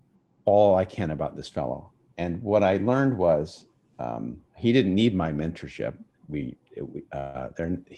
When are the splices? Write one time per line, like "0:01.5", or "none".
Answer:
0:04.5
0:06.1